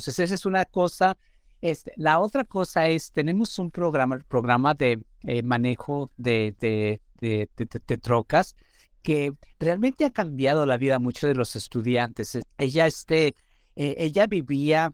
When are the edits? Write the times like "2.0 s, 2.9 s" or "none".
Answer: 12.4 s